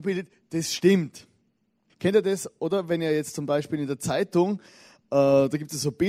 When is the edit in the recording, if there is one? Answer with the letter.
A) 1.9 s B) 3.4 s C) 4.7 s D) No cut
A